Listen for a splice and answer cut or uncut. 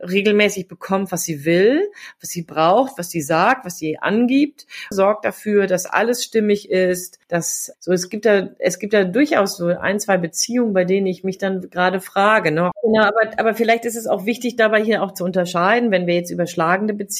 cut